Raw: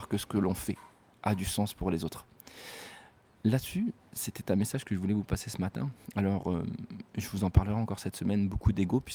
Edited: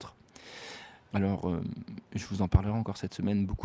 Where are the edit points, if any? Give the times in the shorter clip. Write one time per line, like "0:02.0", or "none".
0:01.1